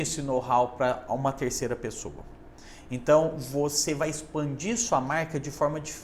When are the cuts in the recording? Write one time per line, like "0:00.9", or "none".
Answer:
none